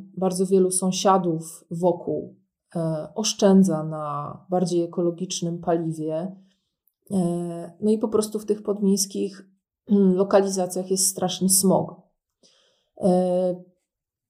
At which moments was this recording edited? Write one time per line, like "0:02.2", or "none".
none

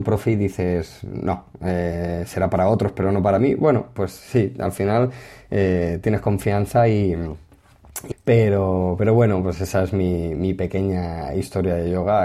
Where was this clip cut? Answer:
0:08.1

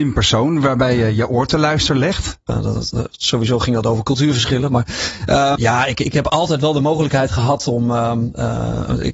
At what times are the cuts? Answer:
0:02.5
0:05.5

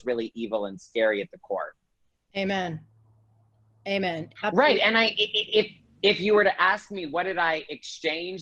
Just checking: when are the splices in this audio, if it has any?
0:04.4

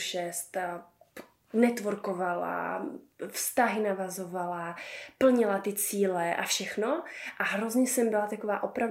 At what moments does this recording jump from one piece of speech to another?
none

